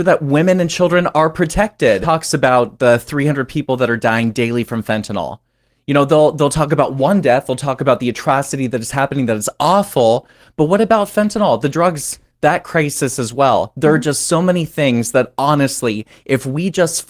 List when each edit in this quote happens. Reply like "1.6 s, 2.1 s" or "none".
2.0 s

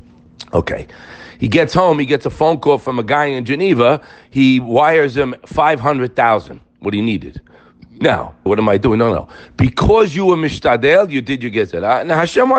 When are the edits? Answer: 8.5 s

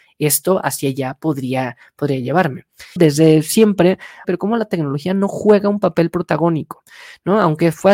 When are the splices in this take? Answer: 3.0 s, 4.2 s

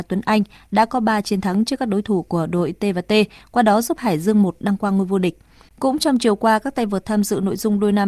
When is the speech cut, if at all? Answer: 5.7 s

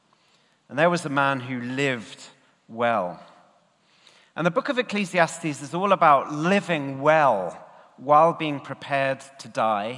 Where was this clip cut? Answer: none

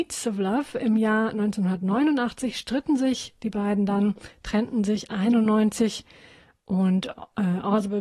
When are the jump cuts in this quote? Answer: none

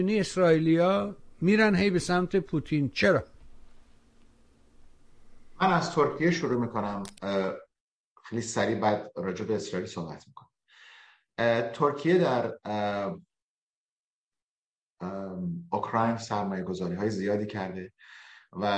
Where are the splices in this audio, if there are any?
none

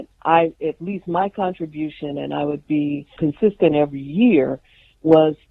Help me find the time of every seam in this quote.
3.2 s

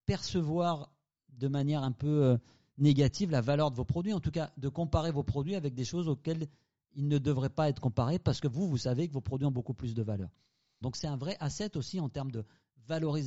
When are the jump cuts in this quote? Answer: 10.8 s

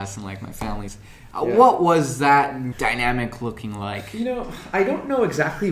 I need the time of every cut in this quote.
2.7 s

